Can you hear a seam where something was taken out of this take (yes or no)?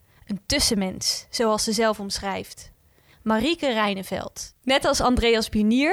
yes